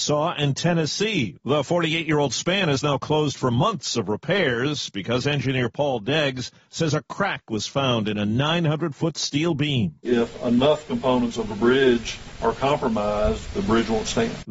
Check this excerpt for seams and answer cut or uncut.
cut